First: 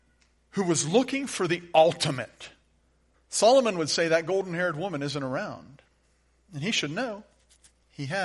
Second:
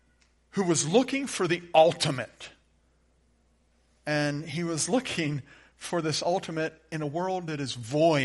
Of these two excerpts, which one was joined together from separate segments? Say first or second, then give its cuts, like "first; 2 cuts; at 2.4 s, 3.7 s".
first; 1 cut; at 3.1 s